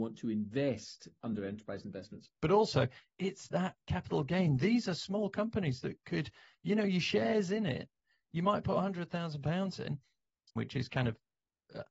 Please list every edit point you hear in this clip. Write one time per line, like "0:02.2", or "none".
0:02.4
0:10.6

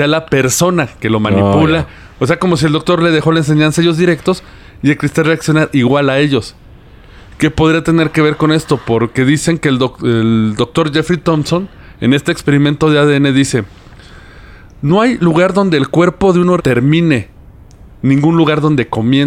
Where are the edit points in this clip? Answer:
0:16.6

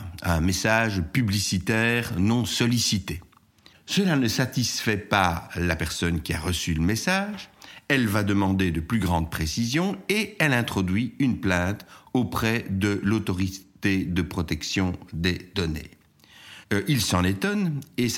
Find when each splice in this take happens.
0:03.7
0:16.6

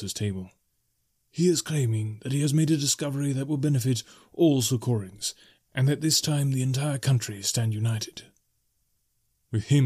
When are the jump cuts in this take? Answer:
none

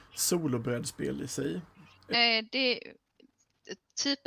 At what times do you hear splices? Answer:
0:02.1

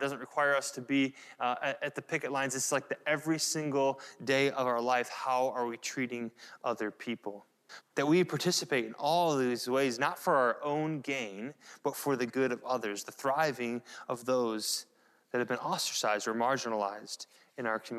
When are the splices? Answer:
0:07.8

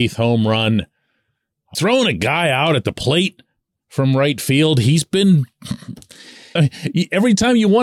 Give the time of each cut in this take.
0:01.7
0:06.6

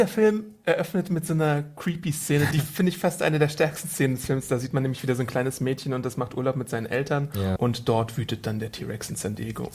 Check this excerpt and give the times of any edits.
0:02.5
0:07.6

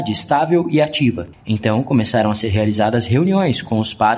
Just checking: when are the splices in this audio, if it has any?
none

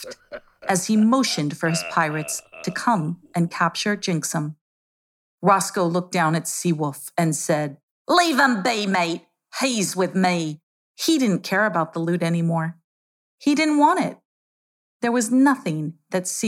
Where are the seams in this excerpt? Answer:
0:10.8

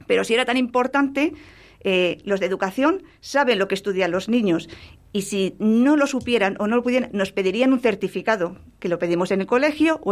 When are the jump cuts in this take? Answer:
none

